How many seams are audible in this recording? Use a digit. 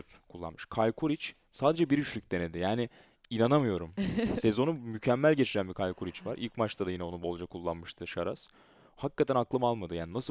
0